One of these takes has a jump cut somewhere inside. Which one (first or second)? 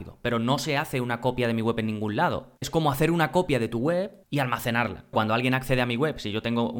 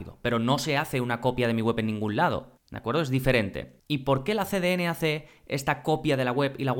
first